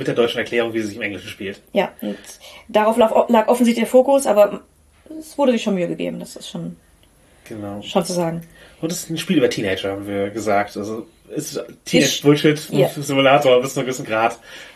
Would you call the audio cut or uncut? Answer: uncut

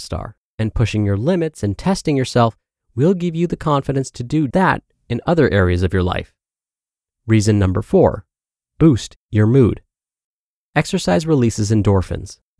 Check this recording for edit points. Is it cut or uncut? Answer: cut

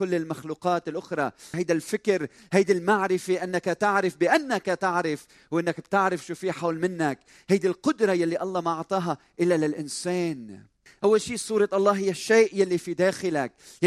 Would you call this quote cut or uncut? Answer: cut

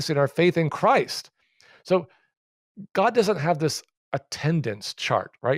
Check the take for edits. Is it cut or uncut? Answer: uncut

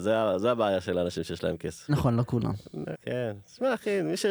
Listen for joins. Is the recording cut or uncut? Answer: cut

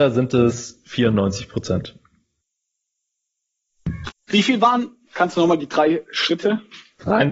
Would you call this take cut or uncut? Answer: cut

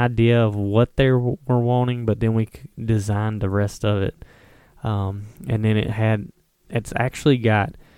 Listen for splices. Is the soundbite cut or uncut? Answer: uncut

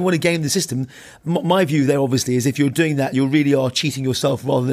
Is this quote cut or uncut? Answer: uncut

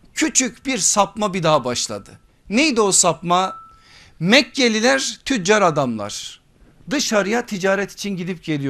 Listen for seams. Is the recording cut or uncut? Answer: uncut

